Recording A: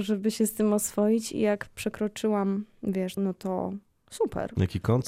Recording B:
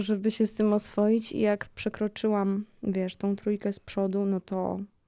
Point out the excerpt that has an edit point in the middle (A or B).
A